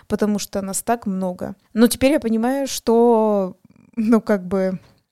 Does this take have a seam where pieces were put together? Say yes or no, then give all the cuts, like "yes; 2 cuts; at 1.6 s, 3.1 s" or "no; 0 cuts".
yes; 1 cut; at 1.6 s